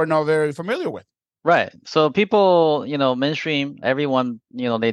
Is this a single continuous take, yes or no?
no